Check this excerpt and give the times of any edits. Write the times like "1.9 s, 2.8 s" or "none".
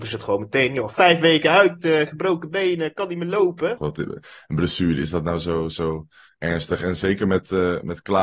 3.8 s

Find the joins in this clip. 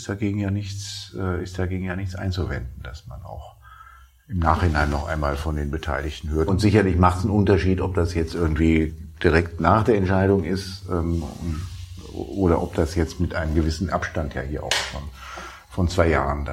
6.5 s

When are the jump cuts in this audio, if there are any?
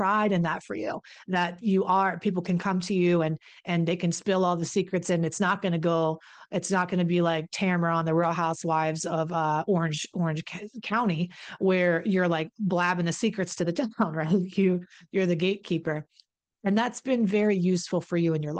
none

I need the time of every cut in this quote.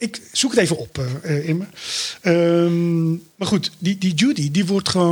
none

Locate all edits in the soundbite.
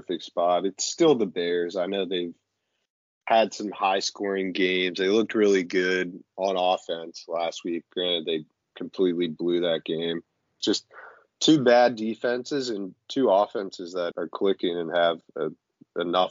10.6 s, 14.1 s

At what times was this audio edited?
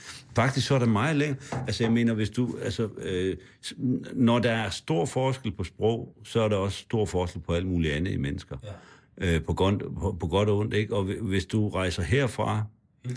none

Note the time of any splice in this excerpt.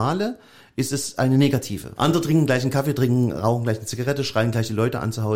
2.0 s

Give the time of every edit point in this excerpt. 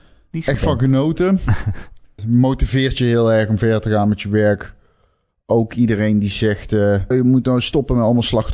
2.2 s, 7.1 s

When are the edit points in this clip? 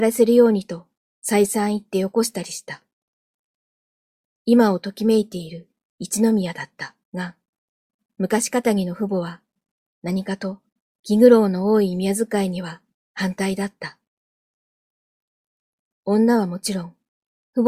7.0 s

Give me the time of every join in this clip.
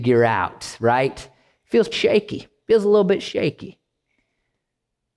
1.9 s

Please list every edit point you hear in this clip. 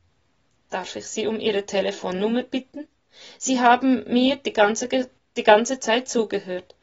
none

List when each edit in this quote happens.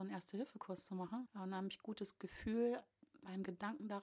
1.3 s

